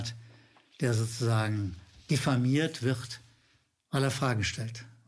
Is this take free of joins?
yes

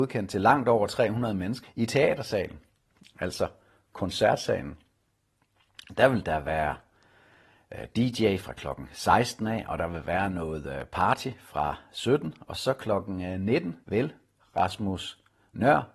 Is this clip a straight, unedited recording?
no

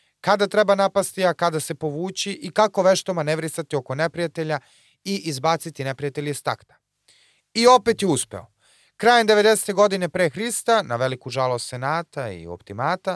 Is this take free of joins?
yes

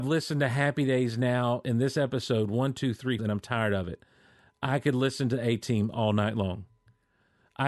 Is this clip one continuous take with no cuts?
no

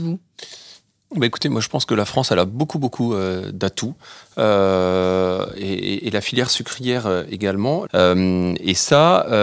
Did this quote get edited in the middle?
yes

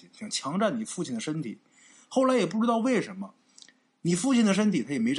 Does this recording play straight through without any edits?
yes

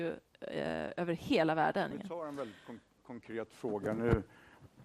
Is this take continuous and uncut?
no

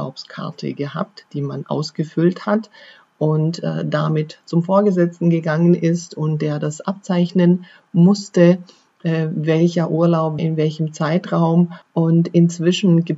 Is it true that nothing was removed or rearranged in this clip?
no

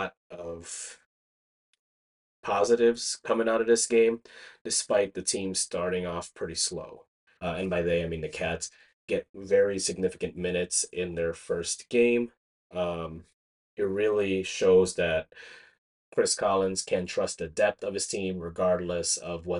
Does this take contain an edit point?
yes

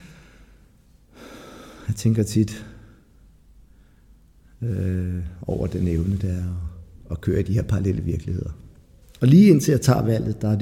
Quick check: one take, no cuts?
no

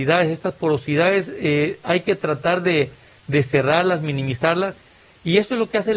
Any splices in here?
no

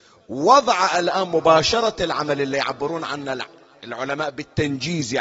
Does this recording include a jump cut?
no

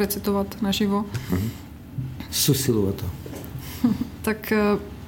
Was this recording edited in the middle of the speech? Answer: yes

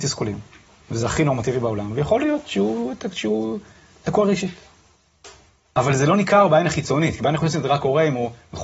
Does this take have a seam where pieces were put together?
no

